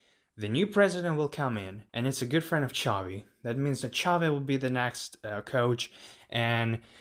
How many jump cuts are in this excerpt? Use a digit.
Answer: 1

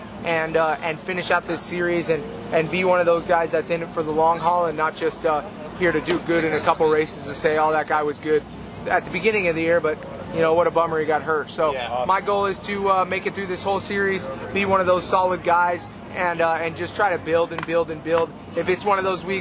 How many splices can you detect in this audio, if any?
0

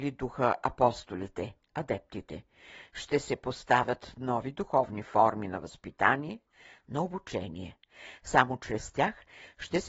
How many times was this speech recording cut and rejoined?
0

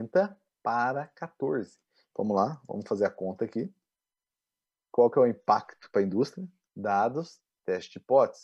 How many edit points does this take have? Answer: 2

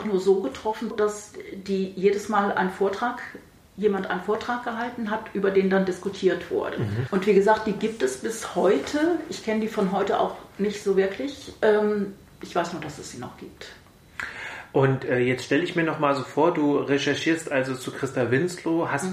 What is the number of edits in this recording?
1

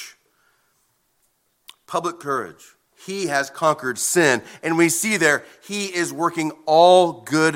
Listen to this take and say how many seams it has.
1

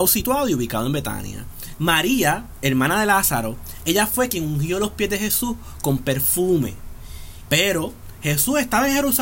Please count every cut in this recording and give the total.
2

